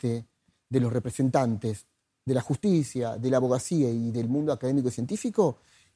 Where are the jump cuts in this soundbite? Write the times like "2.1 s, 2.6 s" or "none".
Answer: none